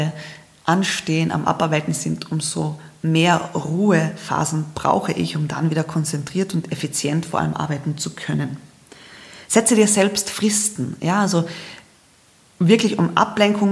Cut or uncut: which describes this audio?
uncut